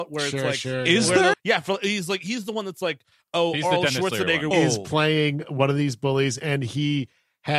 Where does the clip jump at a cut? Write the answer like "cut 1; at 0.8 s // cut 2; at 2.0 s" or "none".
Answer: cut 1; at 1.3 s // cut 2; at 4.5 s